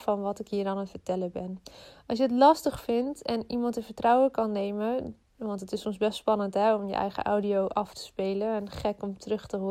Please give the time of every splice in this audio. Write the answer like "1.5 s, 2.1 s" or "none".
none